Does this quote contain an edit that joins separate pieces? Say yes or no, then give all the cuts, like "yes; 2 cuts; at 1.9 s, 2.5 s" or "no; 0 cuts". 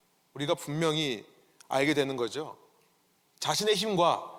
no; 0 cuts